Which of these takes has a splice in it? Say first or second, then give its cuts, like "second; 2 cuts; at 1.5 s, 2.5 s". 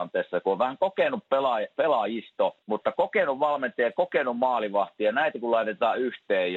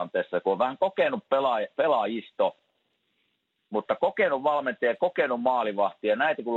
first; 1 cut; at 2.6 s